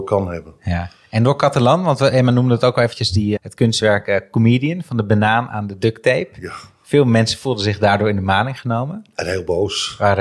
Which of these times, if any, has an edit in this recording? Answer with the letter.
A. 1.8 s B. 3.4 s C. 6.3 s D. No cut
B